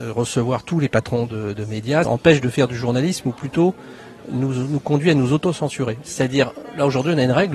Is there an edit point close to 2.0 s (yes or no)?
yes